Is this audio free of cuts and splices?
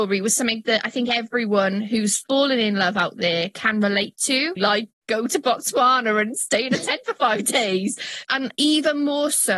no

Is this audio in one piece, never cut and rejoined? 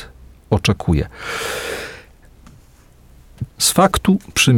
no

